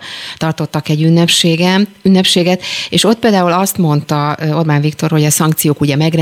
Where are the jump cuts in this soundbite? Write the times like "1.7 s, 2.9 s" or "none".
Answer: none